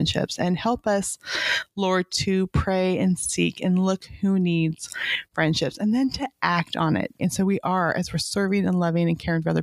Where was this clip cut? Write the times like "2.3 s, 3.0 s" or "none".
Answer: 2.1 s, 7.2 s